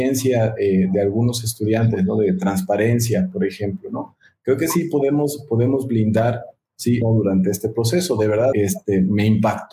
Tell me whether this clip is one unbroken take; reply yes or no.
no